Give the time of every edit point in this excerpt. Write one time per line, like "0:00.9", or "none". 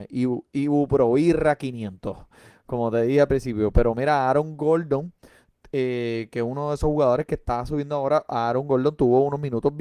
none